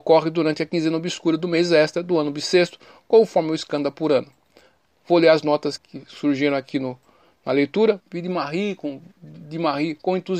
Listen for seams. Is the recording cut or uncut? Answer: cut